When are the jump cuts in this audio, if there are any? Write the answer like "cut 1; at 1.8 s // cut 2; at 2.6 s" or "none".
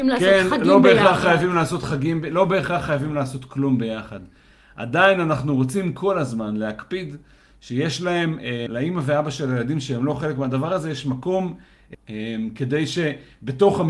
cut 1; at 8.7 s // cut 2; at 11.9 s